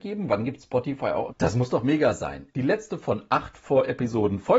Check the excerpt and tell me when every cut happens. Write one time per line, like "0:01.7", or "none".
0:01.3
0:02.5